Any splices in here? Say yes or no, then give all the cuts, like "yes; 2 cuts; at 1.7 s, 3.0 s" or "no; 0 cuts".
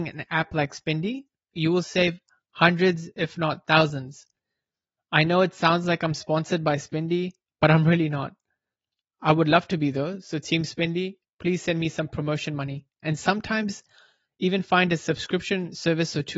yes; 2 cuts; at 11.2 s, 12.9 s